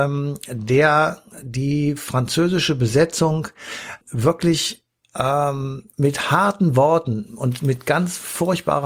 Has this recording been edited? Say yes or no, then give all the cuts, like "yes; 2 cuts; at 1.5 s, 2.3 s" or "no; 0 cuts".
yes; 2 cuts; at 4.0 s, 5.9 s